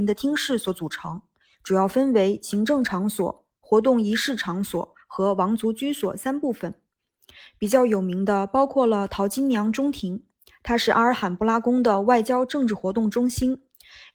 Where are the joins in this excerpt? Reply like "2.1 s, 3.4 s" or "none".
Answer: none